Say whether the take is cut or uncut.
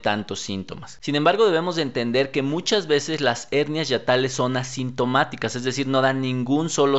cut